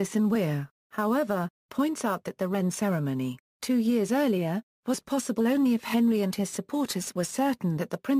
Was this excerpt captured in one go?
yes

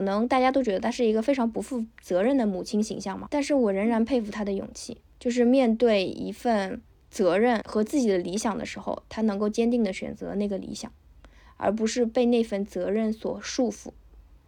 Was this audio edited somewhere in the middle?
no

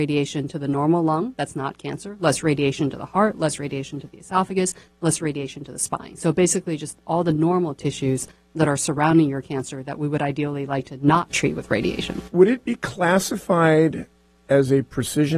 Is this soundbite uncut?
yes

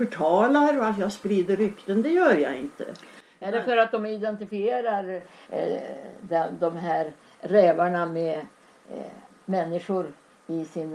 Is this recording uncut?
yes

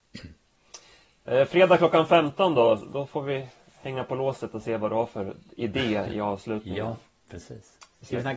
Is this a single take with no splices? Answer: no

